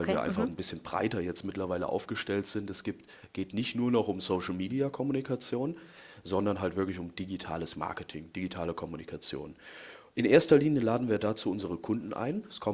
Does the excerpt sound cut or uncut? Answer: uncut